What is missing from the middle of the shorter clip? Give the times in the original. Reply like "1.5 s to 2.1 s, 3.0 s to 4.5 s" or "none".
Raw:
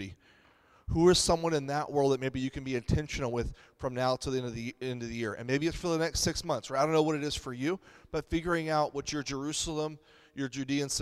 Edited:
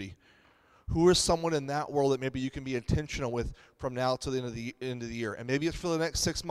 none